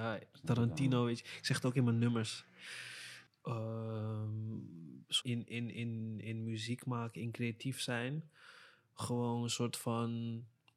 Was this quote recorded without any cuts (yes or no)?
no